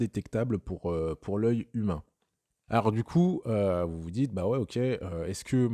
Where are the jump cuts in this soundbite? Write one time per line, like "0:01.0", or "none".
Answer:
0:02.7